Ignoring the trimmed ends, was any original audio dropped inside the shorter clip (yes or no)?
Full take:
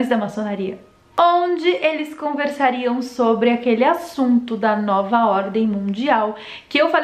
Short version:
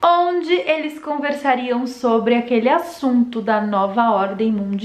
no